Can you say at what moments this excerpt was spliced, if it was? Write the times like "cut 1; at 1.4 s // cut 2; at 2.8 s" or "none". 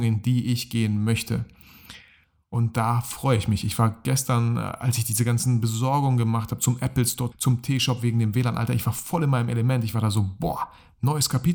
cut 1; at 7.3 s